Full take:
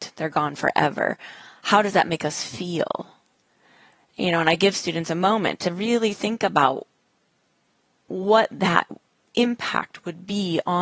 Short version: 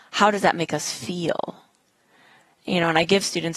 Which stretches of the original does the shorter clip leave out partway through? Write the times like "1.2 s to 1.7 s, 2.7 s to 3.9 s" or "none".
none